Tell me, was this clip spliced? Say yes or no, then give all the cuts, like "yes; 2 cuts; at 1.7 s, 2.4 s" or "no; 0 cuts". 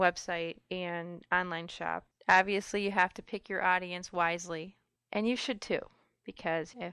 yes; 2 cuts; at 2.1 s, 5.0 s